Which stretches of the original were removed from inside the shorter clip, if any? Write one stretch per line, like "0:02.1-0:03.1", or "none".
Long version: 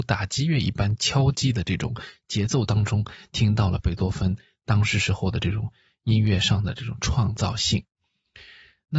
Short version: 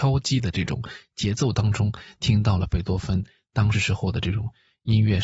0:04.9-0:04.9